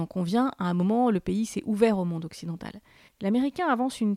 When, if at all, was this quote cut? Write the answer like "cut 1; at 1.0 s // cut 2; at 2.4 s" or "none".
cut 1; at 3.1 s